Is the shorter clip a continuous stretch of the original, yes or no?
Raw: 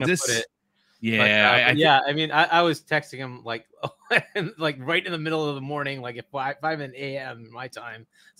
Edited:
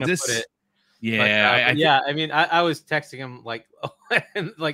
yes